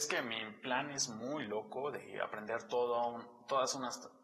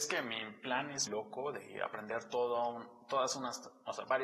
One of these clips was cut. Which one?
second; 1 cut; at 1.1 s

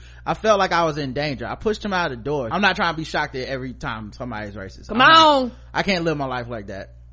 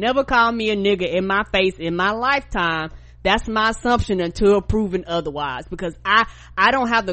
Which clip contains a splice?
first; 1 cut; at 2.5 s

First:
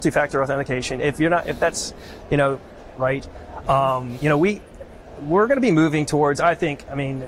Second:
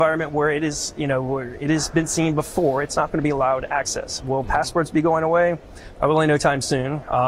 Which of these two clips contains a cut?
first; 1 cut; at 2.9 s

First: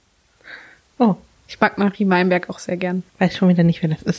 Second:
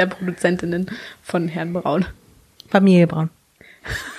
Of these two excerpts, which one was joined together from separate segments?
first; 1 cut; at 3.1 s

